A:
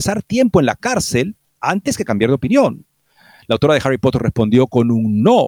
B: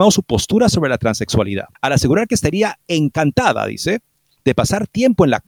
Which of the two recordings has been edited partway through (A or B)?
B